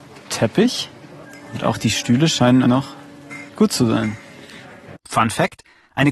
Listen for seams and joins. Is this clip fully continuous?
no; 2 cuts; at 2.6 s, 4.9 s

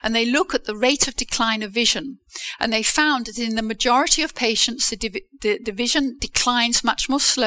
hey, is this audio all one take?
yes; 0 cuts

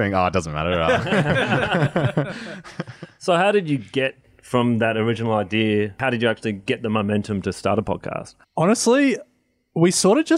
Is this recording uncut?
no; 1 cut; at 8.4 s

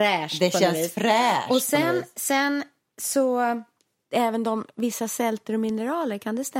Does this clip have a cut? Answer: no; 0 cuts

